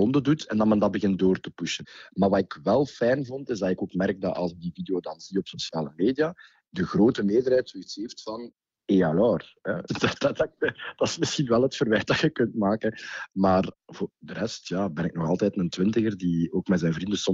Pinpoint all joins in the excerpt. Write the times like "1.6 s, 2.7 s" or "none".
9.9 s